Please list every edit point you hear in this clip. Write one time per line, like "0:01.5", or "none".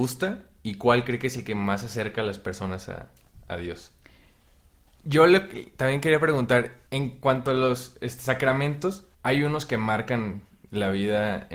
0:04.9
0:06.9
0:09.1